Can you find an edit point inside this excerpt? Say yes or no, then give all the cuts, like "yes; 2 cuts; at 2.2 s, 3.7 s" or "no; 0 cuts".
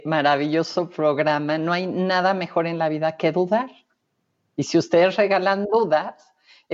no; 0 cuts